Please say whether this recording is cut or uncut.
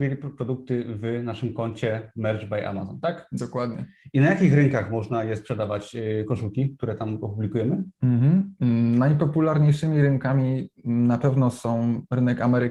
uncut